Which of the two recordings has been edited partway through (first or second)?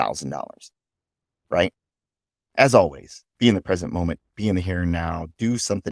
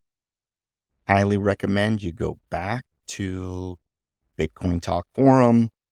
first